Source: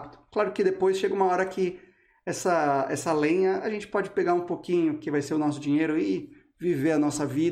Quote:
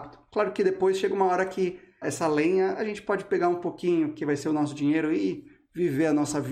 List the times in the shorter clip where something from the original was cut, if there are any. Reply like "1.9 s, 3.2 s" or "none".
2.0 s